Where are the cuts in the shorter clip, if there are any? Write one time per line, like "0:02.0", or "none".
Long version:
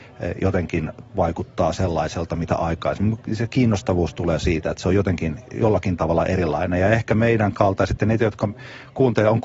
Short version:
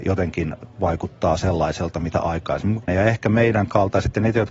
0:02.9